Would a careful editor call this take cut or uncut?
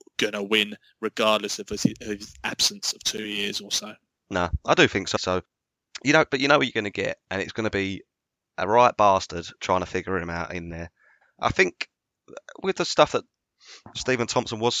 cut